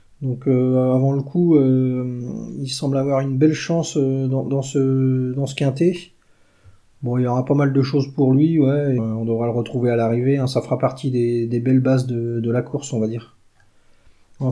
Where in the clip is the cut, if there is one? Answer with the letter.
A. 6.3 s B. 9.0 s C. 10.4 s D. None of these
B